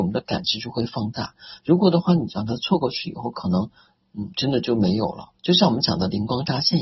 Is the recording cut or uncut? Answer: uncut